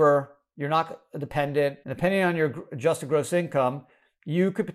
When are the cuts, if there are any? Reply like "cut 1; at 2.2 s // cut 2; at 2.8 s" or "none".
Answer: cut 1; at 1.8 s